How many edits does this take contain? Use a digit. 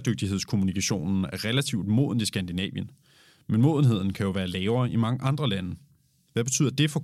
0